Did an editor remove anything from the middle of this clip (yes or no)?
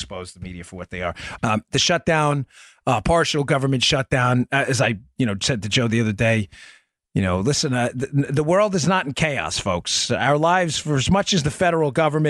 yes